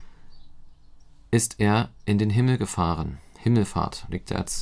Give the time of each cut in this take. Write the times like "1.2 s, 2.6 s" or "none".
none